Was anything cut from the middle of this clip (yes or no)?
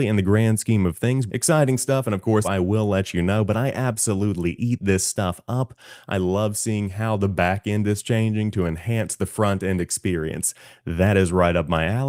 yes